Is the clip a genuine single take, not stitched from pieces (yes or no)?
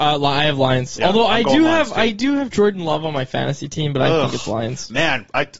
yes